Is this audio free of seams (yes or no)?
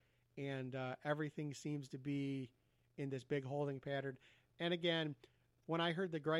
yes